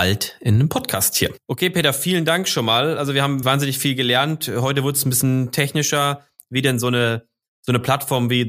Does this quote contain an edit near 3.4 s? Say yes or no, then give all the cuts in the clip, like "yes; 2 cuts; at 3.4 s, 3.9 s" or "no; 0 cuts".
yes; 1 cut; at 3.4 s